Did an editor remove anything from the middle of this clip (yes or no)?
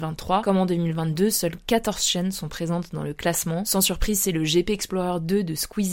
no